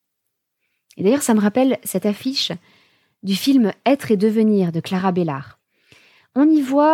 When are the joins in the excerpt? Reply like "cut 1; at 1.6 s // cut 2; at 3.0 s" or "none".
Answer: none

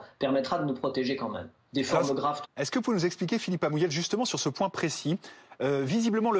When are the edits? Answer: cut 1; at 2.4 s

